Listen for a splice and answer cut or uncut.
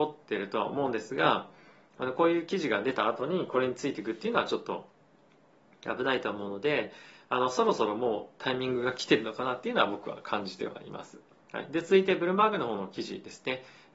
cut